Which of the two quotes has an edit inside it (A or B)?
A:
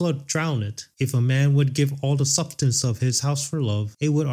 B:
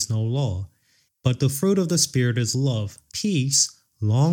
B